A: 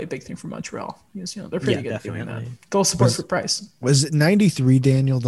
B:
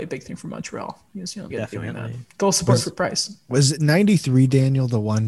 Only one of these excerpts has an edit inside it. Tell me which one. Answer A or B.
B